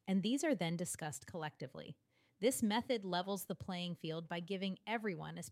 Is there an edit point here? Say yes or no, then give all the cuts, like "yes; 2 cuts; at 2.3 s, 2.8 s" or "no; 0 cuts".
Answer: no; 0 cuts